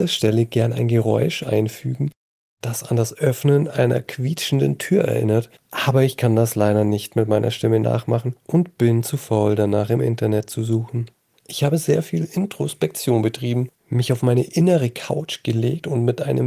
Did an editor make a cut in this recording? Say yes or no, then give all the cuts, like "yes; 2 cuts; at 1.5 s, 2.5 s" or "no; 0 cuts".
yes; 1 cut; at 11.3 s